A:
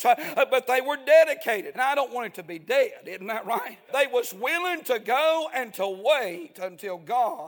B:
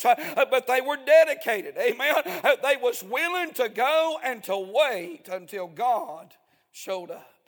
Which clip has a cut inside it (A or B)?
A